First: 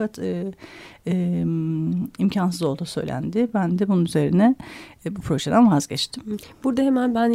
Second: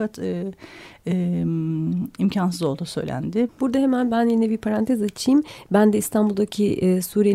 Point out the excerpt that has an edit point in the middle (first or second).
second